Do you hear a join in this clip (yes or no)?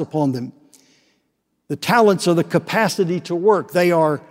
no